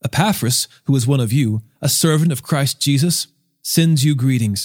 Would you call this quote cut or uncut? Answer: uncut